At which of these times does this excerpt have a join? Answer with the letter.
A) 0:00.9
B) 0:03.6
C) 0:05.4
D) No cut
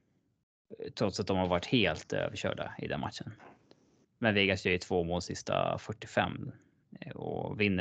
D